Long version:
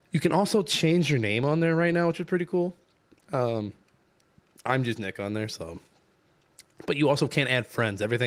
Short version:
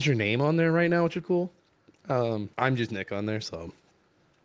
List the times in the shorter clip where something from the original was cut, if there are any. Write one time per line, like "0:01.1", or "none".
0:01.2
0:02.5